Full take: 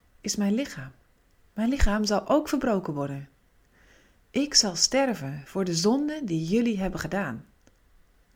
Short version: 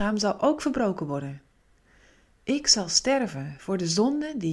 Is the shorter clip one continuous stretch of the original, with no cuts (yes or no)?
yes